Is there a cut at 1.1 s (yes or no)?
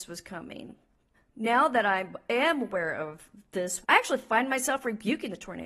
yes